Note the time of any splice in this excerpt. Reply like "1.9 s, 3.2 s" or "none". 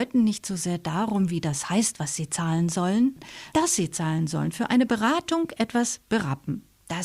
3.5 s